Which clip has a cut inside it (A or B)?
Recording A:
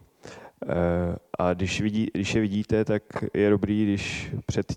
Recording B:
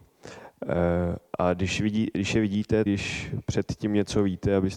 B